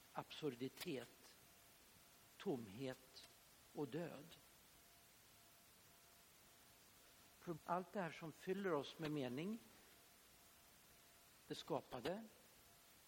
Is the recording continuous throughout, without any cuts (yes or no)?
no